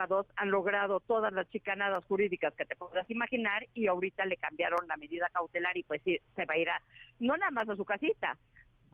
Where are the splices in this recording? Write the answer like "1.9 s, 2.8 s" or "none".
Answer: none